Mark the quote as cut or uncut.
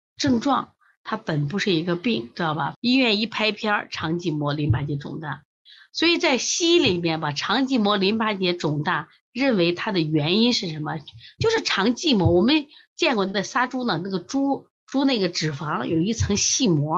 cut